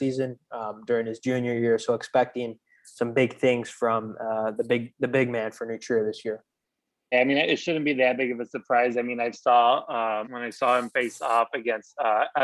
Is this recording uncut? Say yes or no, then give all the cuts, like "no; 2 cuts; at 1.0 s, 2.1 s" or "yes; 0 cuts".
no; 2 cuts; at 7.1 s, 10.2 s